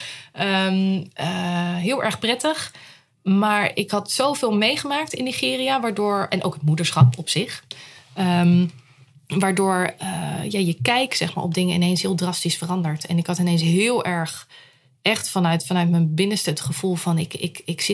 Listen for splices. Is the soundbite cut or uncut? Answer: uncut